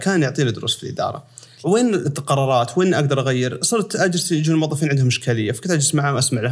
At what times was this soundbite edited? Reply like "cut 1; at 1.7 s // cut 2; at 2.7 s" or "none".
cut 1; at 1.6 s